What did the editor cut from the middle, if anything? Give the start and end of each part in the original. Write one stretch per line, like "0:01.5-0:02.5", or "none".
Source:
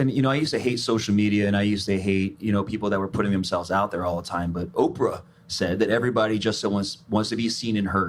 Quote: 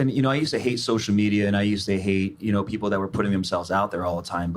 none